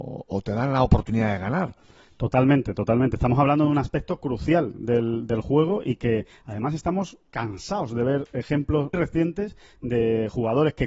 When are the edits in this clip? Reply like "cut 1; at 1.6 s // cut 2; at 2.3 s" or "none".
cut 1; at 8.9 s